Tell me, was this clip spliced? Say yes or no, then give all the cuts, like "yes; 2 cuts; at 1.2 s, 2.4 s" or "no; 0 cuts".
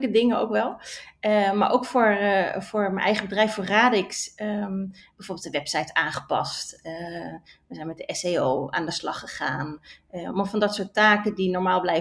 no; 0 cuts